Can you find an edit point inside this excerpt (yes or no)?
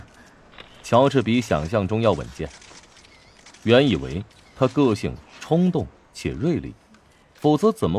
no